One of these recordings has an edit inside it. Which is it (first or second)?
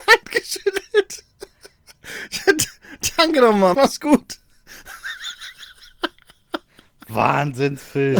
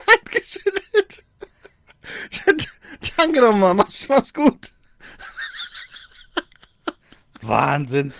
first